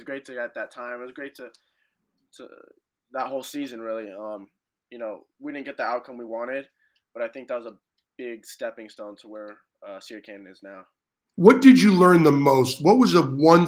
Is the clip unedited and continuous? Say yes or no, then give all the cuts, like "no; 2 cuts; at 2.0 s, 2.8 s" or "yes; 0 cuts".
yes; 0 cuts